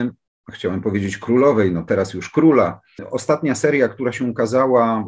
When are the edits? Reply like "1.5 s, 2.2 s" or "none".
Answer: none